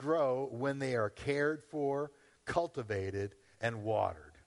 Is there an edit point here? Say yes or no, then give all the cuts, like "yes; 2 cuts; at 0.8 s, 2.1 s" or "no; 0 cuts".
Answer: no; 0 cuts